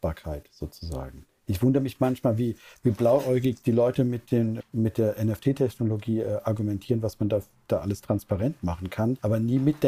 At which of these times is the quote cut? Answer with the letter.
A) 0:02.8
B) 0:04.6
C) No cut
B